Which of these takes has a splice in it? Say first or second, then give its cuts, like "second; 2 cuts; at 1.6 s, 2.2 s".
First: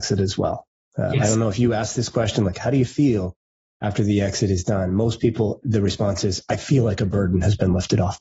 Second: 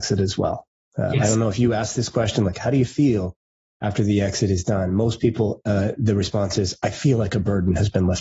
first; 1 cut; at 5.6 s